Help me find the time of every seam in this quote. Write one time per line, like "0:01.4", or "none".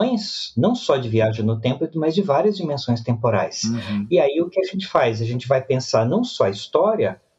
none